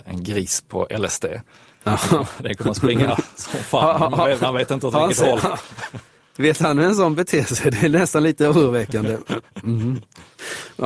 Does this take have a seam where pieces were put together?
no; 0 cuts

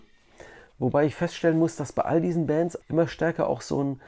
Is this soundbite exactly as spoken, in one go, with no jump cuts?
no; 1 cut; at 2.8 s

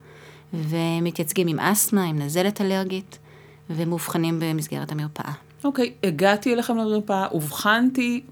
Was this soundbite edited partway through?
no; 0 cuts

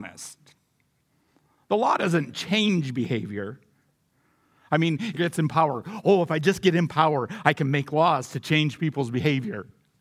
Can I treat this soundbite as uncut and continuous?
no; 1 cut; at 5.1 s

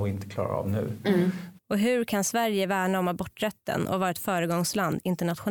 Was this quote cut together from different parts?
yes; 1 cut; at 1.6 s

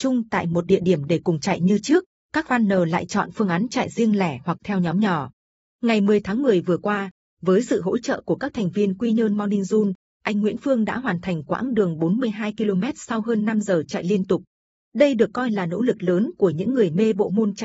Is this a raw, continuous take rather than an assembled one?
yes; 0 cuts

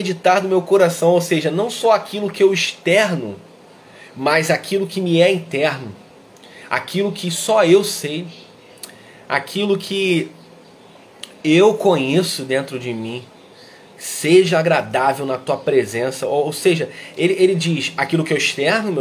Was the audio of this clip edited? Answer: no; 0 cuts

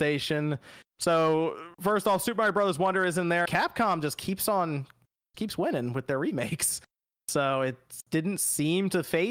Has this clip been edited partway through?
yes; 1 cut; at 3.5 s

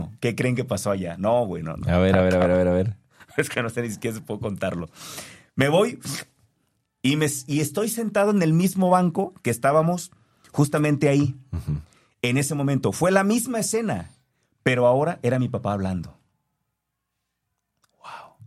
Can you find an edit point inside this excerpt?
no; 0 cuts

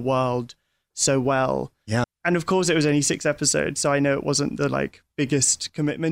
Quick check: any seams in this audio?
yes; 1 cut; at 2.0 s

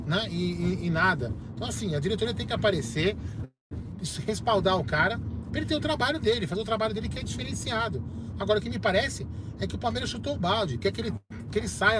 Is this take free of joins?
yes; 0 cuts

